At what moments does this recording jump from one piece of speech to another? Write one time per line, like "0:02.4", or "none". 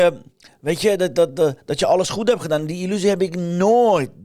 none